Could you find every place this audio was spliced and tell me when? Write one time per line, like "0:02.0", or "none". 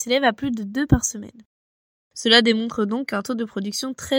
none